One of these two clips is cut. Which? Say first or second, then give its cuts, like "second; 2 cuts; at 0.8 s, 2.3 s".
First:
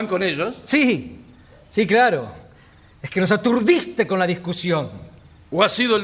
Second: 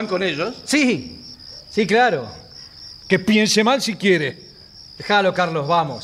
second; 2 cuts; at 3.0 s, 5.0 s